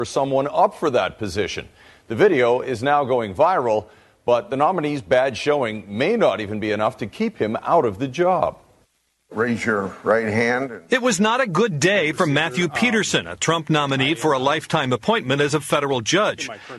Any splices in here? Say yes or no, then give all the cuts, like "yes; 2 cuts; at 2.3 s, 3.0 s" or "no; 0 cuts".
no; 0 cuts